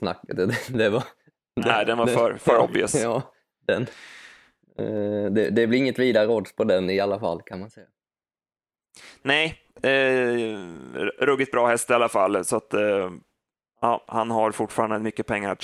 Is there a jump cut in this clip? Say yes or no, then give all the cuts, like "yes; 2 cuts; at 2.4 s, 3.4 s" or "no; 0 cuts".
no; 0 cuts